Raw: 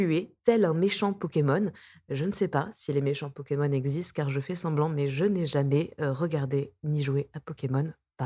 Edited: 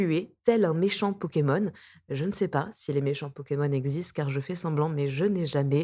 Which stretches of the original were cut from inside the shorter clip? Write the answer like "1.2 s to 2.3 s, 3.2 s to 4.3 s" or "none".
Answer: none